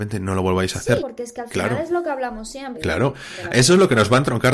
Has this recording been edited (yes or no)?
yes